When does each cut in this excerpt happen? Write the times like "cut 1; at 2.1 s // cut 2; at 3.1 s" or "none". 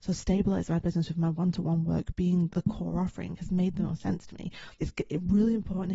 cut 1; at 2.5 s // cut 2; at 4.8 s